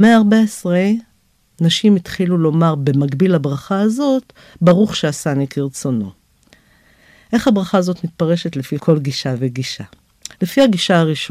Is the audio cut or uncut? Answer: uncut